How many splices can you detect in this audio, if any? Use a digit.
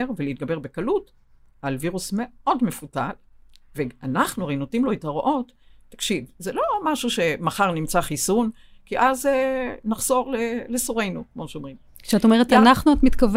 0